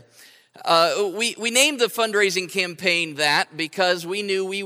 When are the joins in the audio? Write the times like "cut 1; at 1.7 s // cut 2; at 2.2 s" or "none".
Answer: none